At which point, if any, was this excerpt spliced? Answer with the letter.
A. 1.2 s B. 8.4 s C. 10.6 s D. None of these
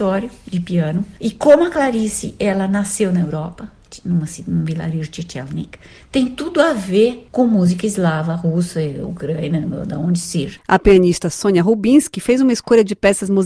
C